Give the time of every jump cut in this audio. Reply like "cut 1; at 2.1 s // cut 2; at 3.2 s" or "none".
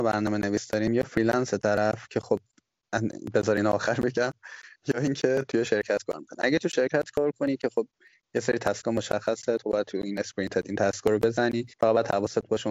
cut 1; at 11.7 s